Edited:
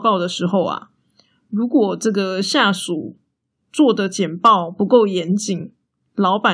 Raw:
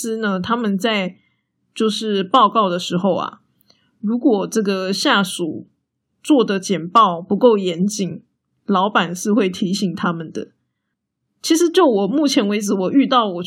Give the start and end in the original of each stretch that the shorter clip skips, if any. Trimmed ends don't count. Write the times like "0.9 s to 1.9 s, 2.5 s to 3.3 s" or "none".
none

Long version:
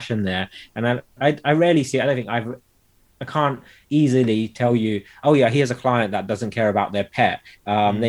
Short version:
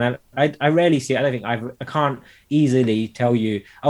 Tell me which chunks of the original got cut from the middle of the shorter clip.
2.6 s to 3.2 s

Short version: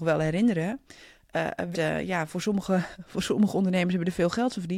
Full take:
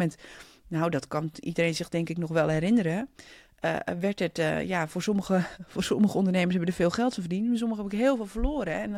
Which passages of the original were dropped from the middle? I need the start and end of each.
4.0 s to 4.3 s

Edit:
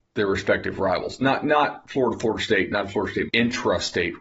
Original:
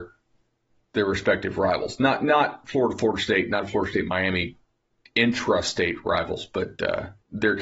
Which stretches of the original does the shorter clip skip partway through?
4.0 s to 5.1 s

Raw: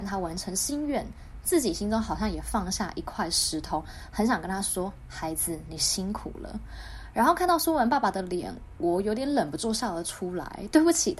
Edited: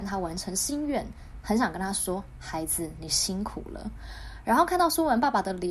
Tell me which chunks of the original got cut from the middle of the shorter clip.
1.4 s to 4.1 s

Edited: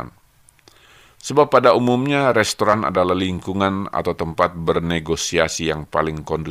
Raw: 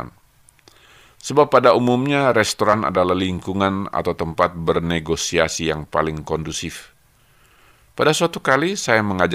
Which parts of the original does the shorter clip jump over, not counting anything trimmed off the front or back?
none

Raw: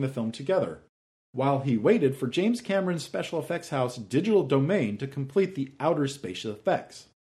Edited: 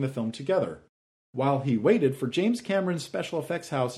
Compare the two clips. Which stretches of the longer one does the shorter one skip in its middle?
none

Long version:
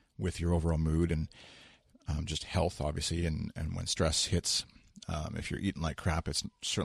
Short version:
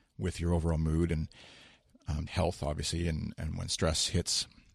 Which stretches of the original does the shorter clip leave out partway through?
2.3 s to 2.4 s

